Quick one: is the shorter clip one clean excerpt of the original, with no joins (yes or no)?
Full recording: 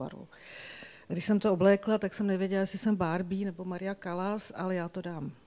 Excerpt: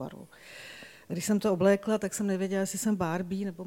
yes